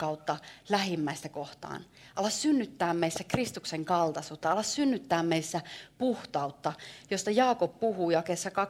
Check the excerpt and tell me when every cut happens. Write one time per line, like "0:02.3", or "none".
none